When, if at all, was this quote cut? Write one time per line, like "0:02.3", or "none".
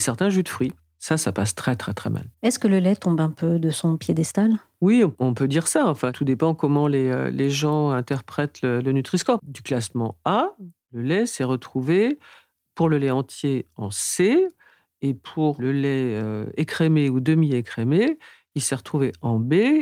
0:09.4
0:15.6